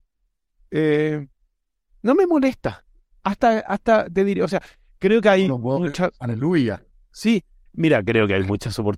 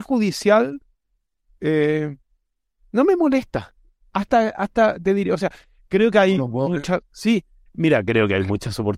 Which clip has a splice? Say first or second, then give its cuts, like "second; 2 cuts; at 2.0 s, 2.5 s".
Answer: second; 1 cut; at 7.0 s